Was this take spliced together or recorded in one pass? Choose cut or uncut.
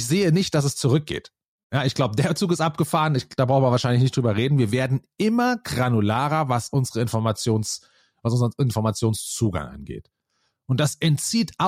uncut